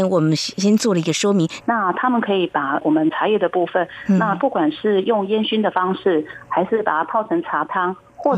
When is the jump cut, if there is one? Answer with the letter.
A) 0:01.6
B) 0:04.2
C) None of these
A